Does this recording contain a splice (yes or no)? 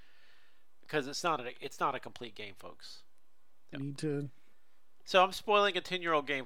yes